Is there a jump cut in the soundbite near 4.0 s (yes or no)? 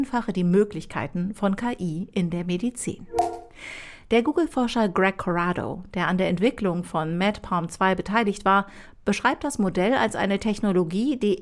yes